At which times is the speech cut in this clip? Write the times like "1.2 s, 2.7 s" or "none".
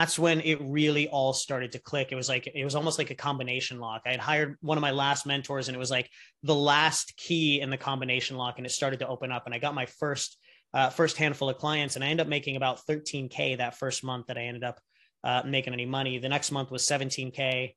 none